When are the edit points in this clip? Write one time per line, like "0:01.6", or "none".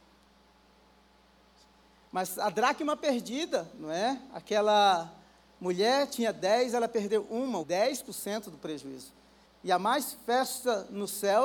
0:07.6
0:09.4